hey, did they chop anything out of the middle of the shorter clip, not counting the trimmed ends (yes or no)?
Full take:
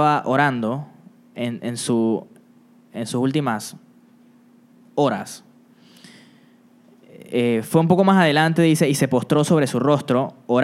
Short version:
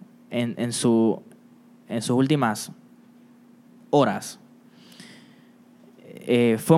no